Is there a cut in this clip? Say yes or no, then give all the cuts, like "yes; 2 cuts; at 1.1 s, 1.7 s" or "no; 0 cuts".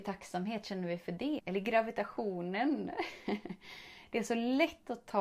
yes; 1 cut; at 1.4 s